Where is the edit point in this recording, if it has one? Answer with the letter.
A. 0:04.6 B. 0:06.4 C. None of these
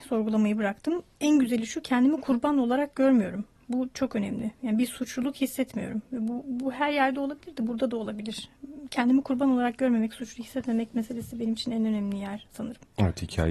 C